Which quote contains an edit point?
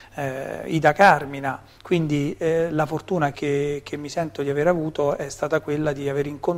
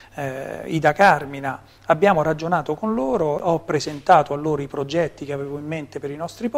first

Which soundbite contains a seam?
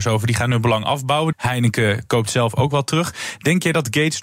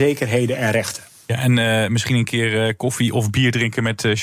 first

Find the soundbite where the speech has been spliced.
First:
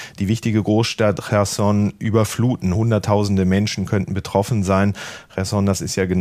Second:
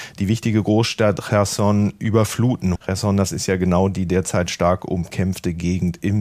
second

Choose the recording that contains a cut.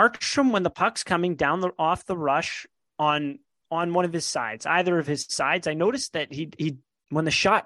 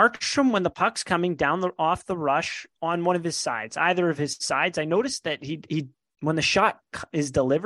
second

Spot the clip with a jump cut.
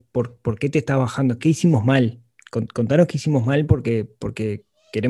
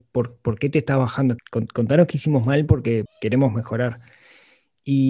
second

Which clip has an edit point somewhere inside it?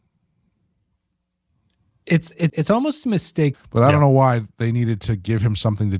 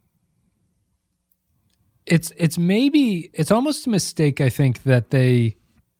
first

